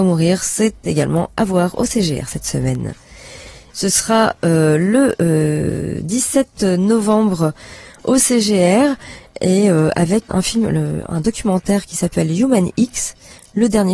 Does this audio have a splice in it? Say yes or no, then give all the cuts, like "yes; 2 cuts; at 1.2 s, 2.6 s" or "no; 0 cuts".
yes; 2 cuts; at 3.7 s, 10.3 s